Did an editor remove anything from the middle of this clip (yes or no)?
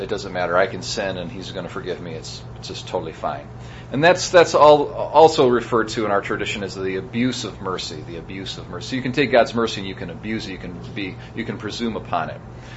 no